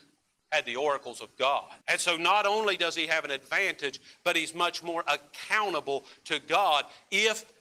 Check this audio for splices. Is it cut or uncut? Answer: cut